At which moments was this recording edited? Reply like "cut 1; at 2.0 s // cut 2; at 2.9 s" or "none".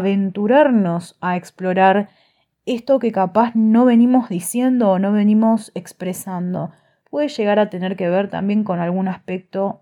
cut 1; at 7.0 s